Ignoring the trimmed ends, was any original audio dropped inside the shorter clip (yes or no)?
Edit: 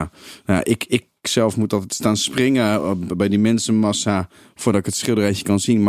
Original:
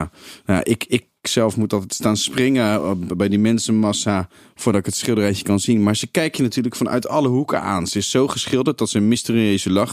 no